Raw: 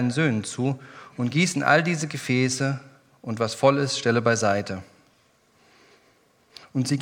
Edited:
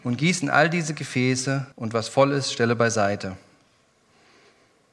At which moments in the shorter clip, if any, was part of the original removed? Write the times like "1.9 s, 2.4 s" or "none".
1.7 s